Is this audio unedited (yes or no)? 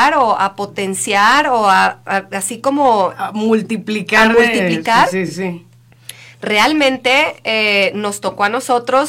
yes